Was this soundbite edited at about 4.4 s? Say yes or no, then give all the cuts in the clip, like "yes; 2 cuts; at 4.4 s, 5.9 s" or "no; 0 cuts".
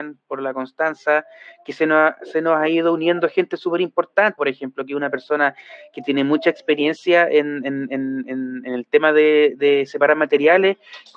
yes; 1 cut; at 4.4 s